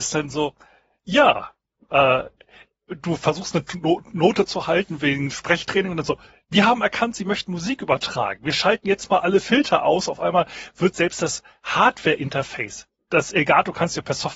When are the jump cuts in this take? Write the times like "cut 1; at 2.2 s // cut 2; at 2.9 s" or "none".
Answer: none

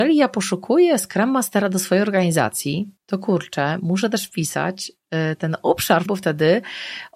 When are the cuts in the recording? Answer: cut 1; at 3.0 s // cut 2; at 6.1 s

